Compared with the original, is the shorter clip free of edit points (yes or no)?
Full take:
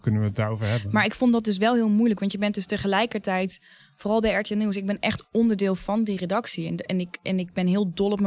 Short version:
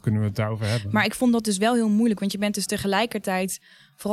yes